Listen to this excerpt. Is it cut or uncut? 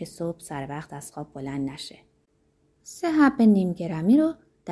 uncut